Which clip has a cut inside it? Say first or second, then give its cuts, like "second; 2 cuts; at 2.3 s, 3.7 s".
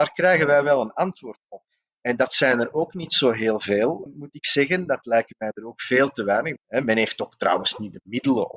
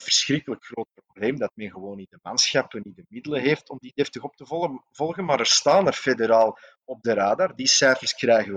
first; 2 cuts; at 4.1 s, 6.6 s